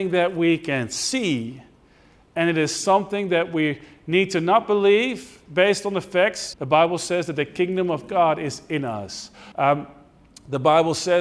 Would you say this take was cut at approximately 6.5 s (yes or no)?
yes